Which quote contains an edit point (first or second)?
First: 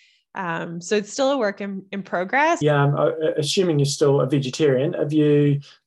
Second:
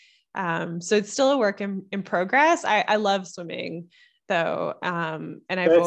first